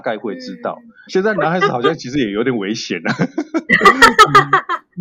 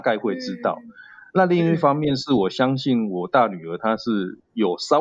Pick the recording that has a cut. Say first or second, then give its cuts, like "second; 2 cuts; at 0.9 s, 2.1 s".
first; 1 cut; at 1.1 s